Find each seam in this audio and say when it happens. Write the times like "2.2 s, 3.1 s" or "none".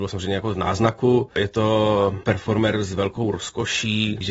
1.3 s